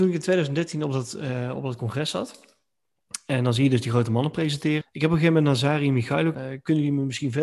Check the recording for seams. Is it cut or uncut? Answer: cut